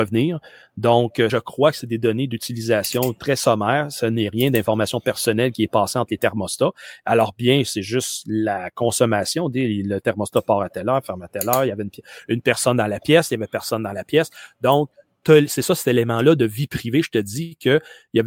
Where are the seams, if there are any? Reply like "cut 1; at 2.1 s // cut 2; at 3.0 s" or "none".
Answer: cut 1; at 1.3 s